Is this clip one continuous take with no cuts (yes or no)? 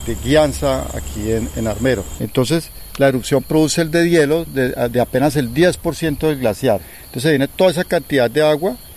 no